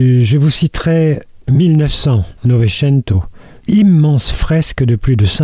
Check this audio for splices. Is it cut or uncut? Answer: cut